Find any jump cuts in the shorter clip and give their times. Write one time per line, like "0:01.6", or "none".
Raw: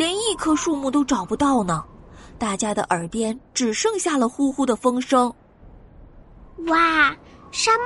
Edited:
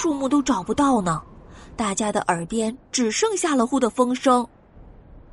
0:03.7